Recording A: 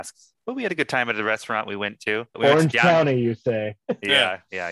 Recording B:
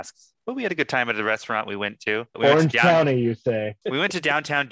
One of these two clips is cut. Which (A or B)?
B